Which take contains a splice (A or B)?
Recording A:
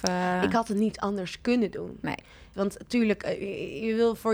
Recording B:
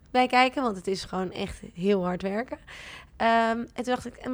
A